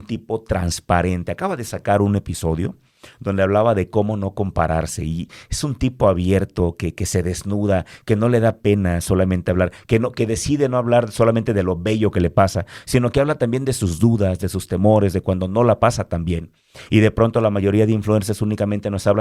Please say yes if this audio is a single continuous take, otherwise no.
yes